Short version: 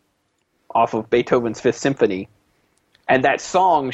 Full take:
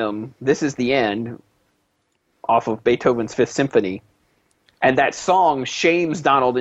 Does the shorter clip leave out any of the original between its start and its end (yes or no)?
no